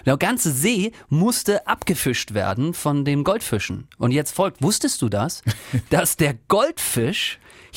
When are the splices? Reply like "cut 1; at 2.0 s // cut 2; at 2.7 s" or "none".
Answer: none